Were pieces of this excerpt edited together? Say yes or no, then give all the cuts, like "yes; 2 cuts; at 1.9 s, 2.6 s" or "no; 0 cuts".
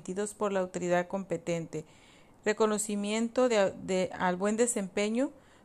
no; 0 cuts